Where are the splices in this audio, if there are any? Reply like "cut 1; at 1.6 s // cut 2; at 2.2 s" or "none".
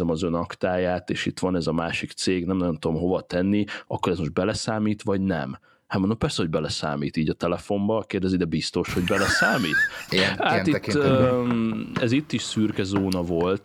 cut 1; at 10.1 s